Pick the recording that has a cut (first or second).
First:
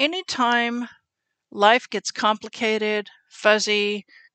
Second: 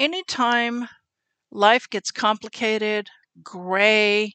second